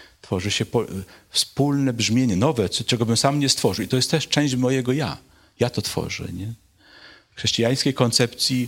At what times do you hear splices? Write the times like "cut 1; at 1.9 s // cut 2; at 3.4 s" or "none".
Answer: none